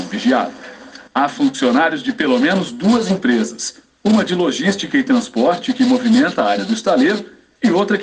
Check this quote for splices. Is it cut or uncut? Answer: cut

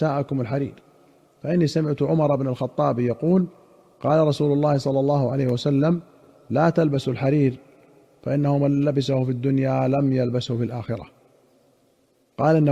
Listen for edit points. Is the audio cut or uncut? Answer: uncut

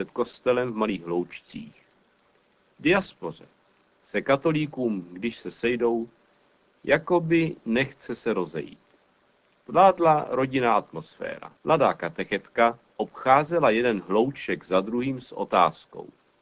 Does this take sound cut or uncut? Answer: cut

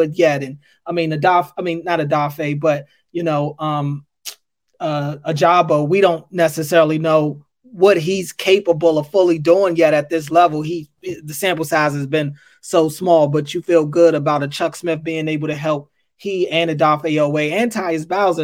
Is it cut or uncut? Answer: uncut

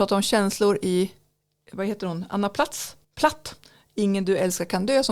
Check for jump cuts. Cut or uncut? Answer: cut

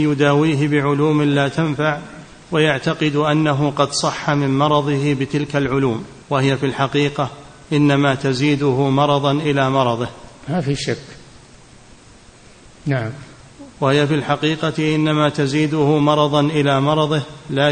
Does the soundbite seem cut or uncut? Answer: cut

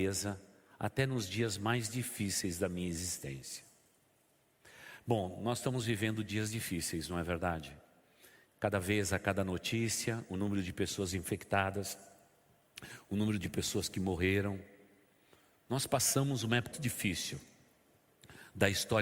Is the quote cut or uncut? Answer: cut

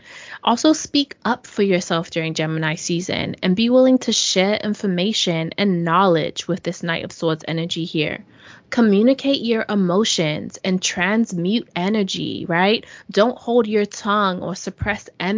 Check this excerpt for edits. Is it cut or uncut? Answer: uncut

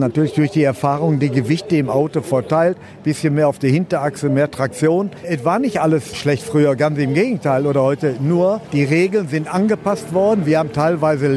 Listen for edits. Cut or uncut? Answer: uncut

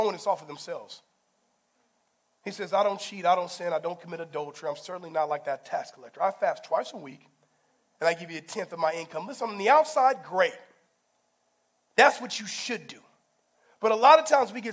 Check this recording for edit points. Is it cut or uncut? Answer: uncut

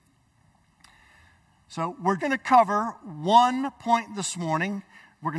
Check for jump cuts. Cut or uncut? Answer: cut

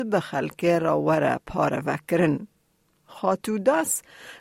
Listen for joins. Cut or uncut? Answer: uncut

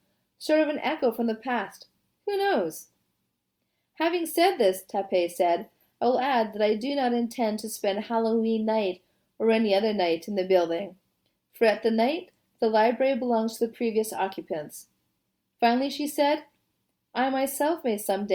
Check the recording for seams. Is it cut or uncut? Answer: cut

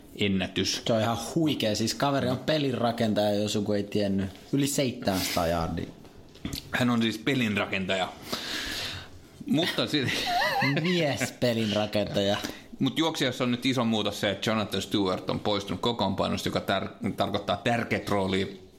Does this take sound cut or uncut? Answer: uncut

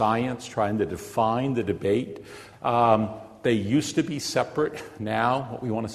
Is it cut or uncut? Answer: cut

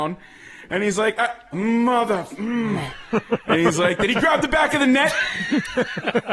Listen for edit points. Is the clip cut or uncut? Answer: cut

